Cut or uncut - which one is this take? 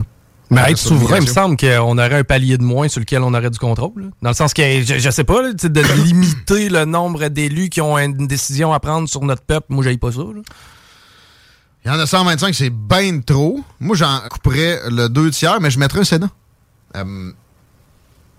cut